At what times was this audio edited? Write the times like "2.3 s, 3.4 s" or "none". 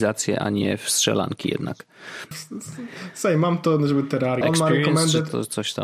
2.3 s, 4.4 s